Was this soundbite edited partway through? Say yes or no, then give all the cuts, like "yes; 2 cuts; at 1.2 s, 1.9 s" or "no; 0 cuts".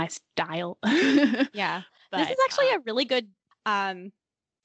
yes; 1 cut; at 3.5 s